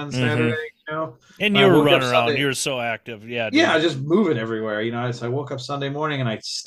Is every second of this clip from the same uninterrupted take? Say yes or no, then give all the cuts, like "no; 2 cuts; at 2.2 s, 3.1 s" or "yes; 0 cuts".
yes; 0 cuts